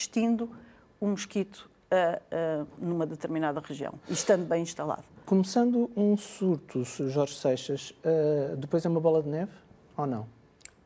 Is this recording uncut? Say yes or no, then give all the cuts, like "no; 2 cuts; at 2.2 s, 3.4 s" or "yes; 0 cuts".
yes; 0 cuts